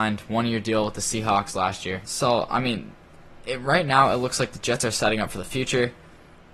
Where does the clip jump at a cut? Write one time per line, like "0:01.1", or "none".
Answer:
0:02.0